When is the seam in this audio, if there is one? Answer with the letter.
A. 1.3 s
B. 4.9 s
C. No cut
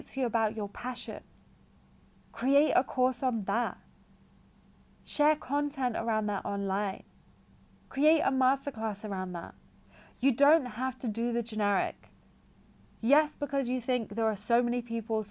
C